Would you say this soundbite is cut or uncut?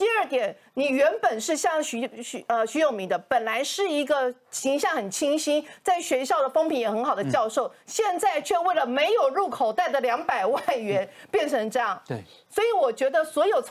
uncut